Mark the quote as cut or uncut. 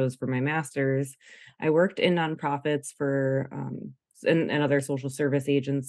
uncut